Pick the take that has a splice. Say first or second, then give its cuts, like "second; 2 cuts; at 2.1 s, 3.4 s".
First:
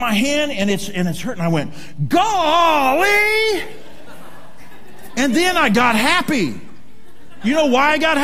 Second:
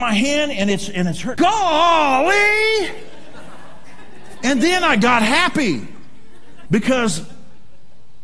second; 2 cuts; at 1.3 s, 6.6 s